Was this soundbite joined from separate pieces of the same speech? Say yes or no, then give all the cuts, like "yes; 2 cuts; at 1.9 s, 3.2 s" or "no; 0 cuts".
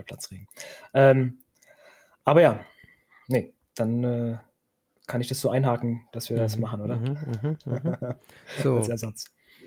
no; 0 cuts